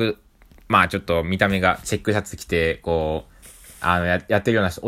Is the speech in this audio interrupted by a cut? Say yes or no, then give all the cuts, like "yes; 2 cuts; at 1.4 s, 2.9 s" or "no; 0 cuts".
no; 0 cuts